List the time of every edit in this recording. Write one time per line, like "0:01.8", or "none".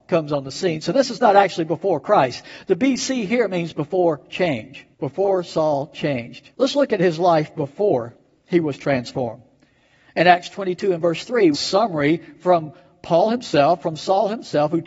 0:04.9
0:06.5
0:11.5